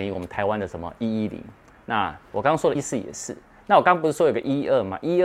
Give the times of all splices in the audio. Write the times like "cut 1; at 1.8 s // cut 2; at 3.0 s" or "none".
cut 1; at 2.7 s